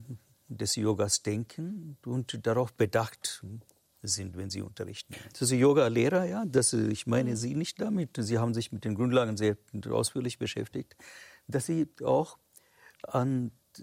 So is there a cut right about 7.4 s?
no; 1 cut; at 5.3 s

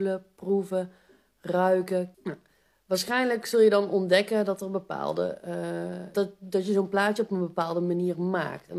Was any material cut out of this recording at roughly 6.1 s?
yes; 2 cuts; at 2.1 s, 6.1 s

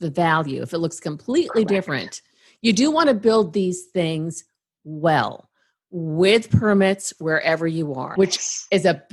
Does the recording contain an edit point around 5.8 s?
no; 1 cut; at 8.2 s

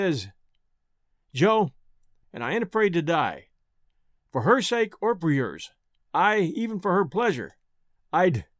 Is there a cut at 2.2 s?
yes; 1 cut; at 2.2 s

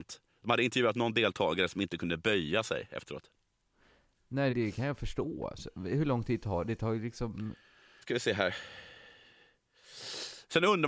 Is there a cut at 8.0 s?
yes; 2 cuts; at 4.5 s, 8.0 s

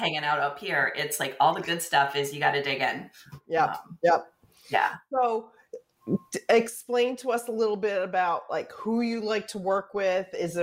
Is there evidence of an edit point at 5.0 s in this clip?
no; 0 cuts

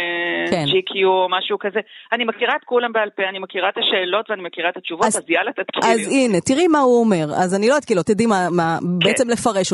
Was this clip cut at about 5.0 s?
no; 1 cut; at 8.0 s

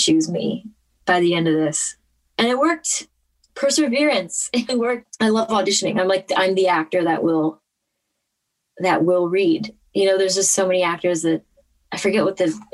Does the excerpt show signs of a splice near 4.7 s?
yes; 1 cut; at 4.7 s

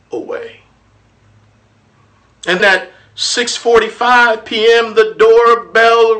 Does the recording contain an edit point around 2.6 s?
yes; 1 cut; at 2.6 s

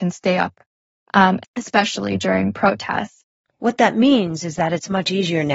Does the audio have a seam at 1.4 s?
yes; 1 cut; at 1.4 s

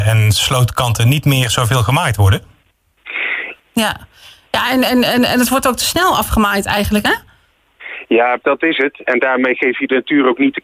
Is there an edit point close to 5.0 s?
no; 3 cuts; at 3.6 s, 7.1 s, 8.4 s

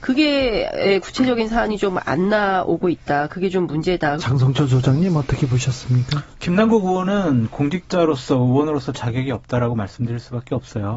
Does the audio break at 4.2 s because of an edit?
yes; 1 cut; at 4.2 s

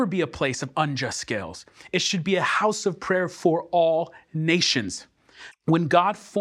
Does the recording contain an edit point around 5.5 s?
yes; 1 cut; at 5.5 s

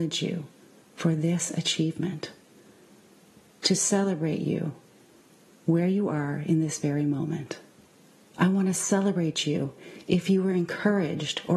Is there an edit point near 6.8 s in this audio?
no; 1 cut; at 8.3 s

